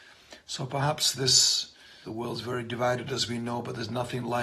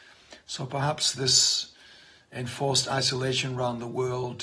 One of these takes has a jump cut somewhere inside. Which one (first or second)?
first